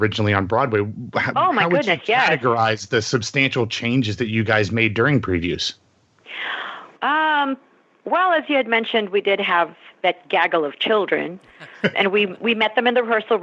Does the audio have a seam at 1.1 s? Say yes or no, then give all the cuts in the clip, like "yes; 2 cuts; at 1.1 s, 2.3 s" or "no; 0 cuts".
no; 2 cuts; at 7.0 s, 11.9 s